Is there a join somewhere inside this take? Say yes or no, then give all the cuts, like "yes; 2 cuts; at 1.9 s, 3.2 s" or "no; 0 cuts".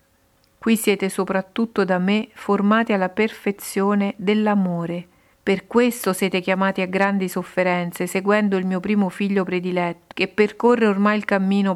yes; 2 cuts; at 5.3 s, 10.1 s